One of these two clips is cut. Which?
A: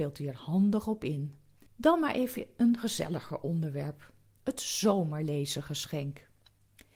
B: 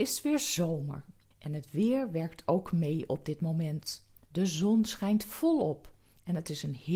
A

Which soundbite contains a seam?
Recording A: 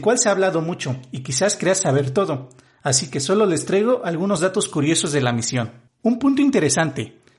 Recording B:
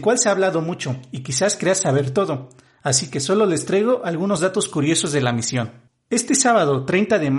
A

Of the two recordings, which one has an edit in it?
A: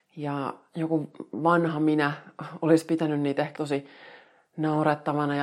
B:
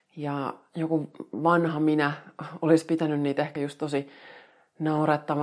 A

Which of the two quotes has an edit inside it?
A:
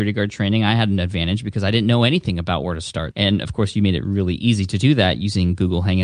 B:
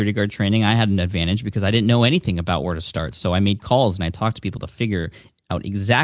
A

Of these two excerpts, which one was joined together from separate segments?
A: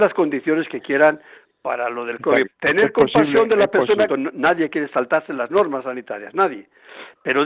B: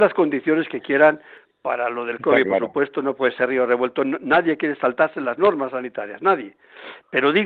A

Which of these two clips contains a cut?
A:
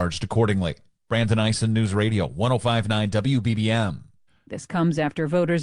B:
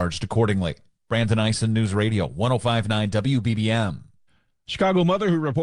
A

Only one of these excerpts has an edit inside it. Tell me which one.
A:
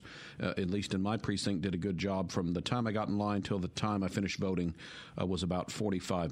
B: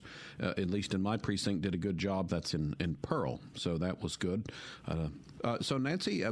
B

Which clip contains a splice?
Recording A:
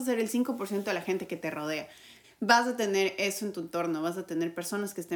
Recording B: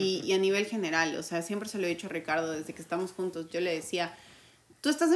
A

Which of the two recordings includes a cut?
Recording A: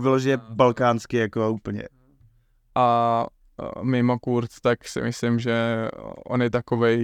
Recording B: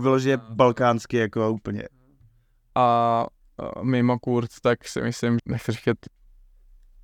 B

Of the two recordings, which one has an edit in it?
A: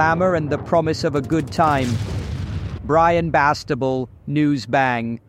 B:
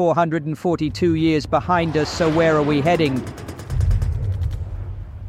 A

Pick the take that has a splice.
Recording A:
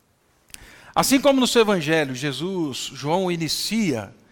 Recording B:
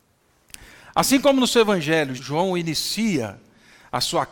B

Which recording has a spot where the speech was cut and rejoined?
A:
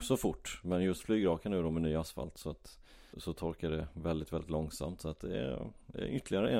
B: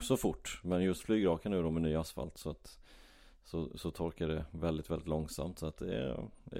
A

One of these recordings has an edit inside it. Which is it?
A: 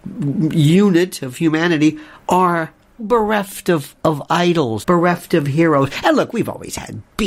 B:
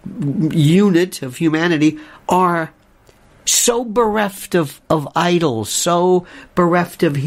A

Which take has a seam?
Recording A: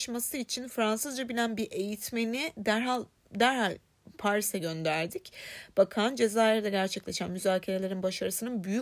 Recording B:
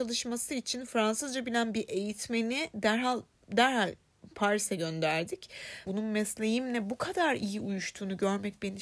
B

